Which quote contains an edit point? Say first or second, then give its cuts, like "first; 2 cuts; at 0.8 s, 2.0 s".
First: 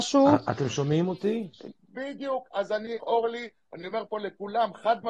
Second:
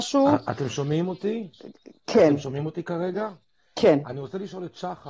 first; 2 cuts; at 1.7 s, 3.0 s